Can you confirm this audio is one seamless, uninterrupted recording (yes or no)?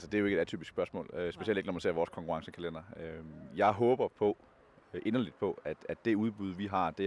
yes